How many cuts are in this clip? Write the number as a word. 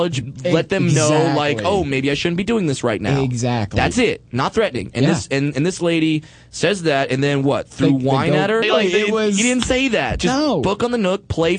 one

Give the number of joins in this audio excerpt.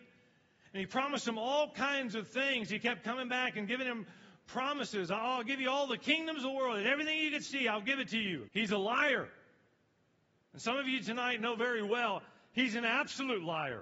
one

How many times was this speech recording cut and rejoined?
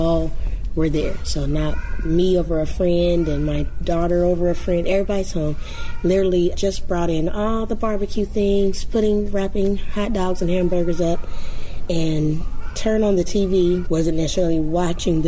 two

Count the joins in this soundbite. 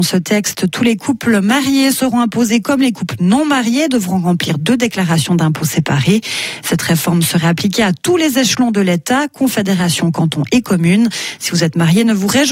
zero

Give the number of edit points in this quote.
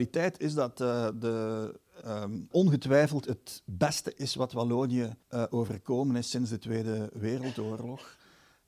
two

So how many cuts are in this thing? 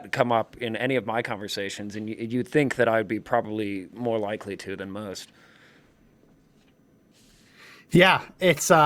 zero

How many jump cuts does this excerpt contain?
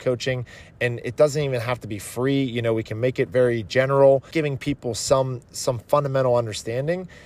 one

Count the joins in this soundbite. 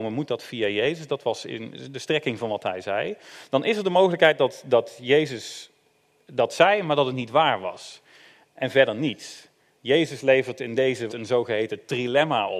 two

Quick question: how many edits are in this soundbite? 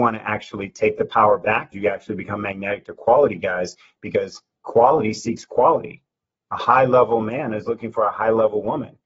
one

